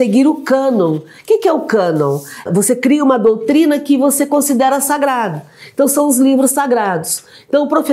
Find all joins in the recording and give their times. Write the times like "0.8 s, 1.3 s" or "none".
2.5 s